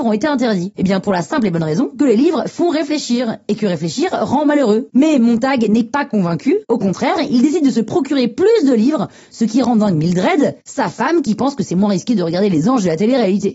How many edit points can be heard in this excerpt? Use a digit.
1